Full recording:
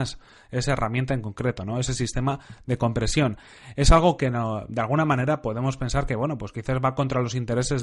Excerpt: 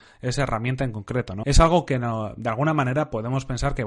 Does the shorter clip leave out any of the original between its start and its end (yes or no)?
yes